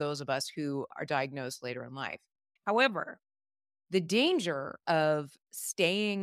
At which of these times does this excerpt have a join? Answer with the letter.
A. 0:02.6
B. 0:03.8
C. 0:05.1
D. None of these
A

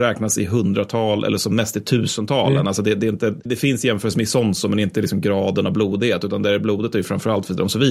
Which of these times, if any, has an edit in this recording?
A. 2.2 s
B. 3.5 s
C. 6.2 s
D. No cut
B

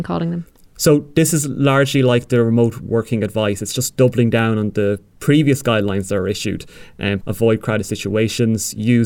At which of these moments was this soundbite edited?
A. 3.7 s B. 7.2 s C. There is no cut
B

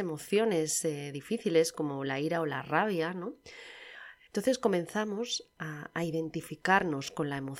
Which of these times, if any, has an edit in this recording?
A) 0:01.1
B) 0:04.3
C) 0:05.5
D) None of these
B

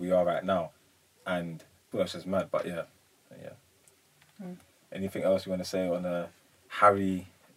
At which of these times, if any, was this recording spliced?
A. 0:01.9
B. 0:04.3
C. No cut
A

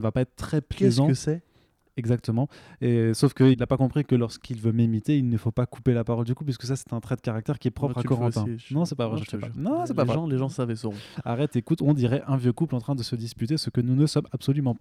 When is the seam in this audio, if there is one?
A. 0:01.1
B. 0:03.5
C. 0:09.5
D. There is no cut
B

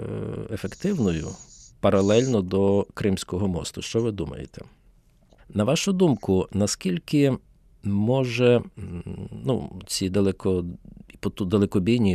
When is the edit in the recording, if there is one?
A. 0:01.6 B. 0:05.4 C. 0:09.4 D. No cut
B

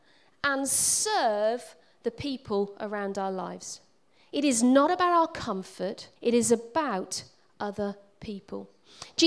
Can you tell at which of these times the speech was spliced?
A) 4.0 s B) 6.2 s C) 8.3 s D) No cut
B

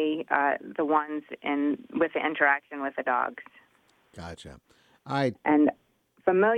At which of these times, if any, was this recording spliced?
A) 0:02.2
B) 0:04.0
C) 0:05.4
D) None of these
C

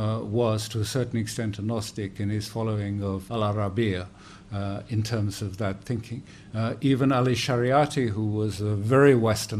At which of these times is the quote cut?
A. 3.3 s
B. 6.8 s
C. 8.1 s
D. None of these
A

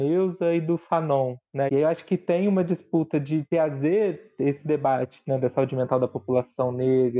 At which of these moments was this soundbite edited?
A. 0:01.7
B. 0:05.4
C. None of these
A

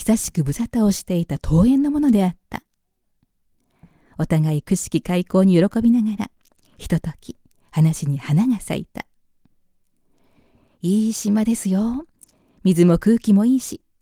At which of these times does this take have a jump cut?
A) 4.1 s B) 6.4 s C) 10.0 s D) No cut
D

